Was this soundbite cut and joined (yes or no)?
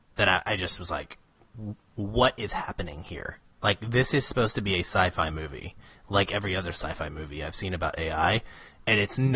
no